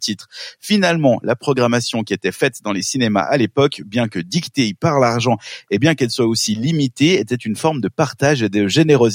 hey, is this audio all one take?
yes; 0 cuts

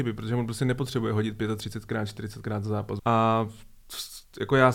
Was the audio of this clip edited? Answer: yes; 1 cut; at 3.0 s

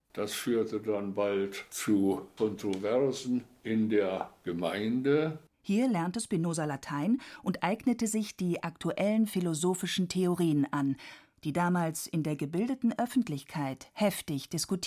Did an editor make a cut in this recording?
yes; 2 cuts; at 5.5 s, 11.4 s

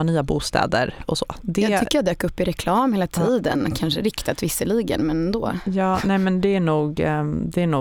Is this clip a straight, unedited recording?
yes; 0 cuts

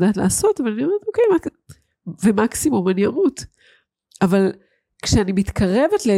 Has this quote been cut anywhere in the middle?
no; 0 cuts

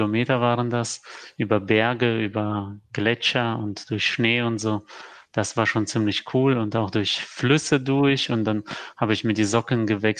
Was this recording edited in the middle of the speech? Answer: no; 0 cuts

